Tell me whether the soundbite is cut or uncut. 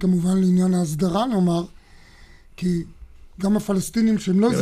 uncut